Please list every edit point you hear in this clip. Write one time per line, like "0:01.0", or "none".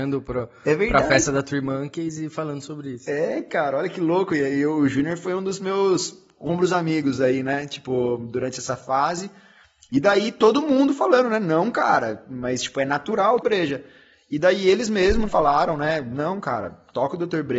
0:13.4
0:15.3